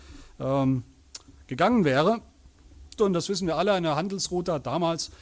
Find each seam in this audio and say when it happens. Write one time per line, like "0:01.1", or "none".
0:03.0